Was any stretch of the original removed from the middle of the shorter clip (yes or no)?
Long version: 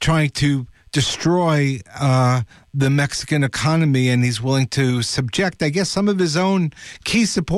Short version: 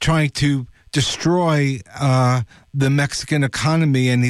no